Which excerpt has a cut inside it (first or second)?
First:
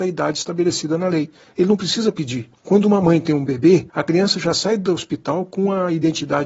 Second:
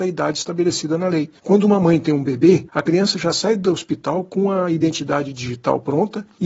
second